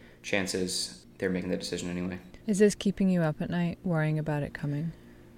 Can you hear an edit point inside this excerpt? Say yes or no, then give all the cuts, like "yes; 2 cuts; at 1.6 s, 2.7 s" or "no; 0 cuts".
yes; 1 cut; at 2.4 s